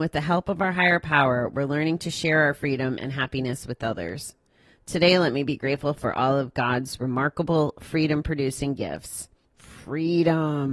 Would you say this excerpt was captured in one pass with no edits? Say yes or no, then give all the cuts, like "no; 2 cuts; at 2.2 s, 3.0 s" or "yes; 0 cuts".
no; 1 cut; at 9.4 s